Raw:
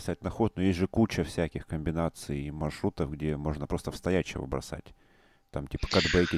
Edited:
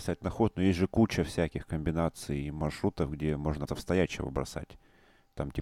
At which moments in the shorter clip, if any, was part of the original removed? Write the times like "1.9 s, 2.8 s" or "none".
3.7 s

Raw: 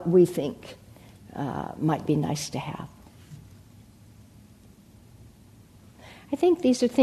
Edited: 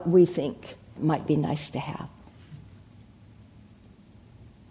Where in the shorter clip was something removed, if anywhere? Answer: 1.0 s

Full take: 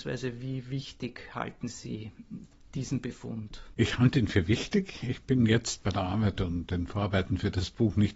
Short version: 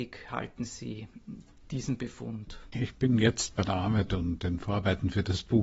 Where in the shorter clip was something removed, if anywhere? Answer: 2.7 s

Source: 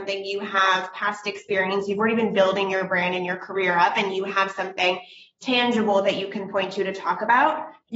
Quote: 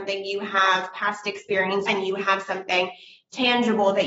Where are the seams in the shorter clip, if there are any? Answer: 1.9 s

